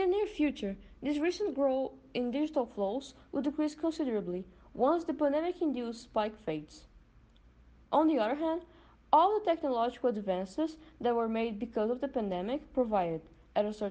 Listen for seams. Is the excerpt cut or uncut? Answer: uncut